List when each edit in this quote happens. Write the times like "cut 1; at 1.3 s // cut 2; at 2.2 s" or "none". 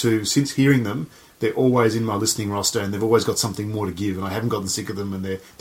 none